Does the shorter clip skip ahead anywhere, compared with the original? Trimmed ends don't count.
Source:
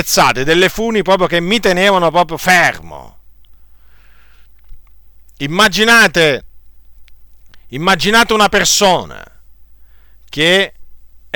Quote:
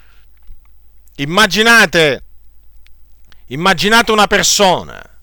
no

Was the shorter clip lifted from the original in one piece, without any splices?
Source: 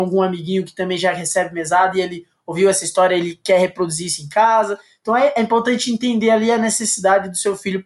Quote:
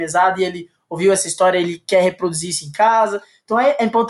yes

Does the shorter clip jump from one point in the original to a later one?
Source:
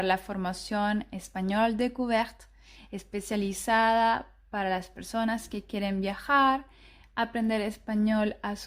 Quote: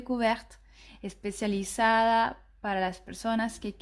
no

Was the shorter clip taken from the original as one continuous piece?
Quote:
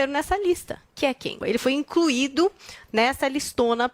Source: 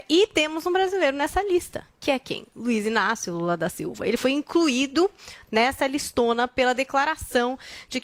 no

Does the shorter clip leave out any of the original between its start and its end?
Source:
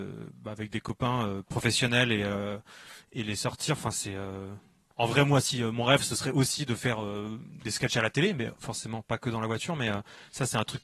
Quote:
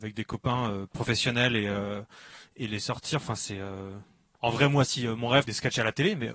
yes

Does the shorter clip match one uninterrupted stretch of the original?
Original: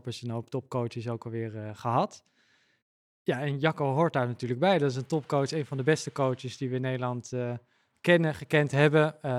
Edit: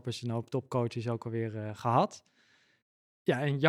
yes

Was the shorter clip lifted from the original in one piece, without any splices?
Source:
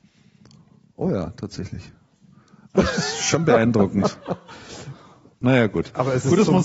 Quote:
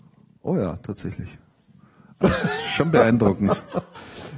yes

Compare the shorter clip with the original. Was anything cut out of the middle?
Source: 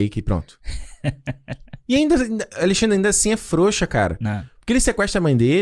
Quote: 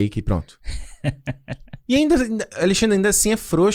no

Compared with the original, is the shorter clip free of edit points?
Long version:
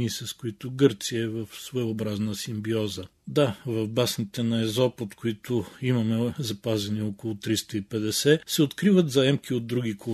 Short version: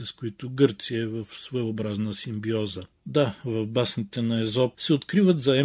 no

